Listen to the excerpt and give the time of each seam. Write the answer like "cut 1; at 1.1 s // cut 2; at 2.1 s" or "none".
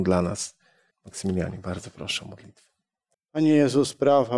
cut 1; at 0.9 s // cut 2; at 3.1 s